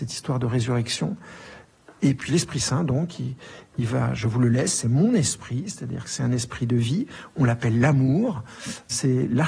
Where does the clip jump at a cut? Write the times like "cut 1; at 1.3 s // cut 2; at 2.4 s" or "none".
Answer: none